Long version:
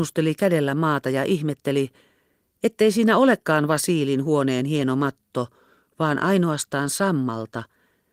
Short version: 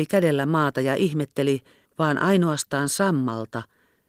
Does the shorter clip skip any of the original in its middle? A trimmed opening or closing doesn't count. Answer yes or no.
yes